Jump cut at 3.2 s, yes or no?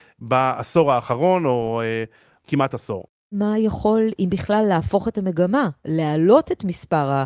no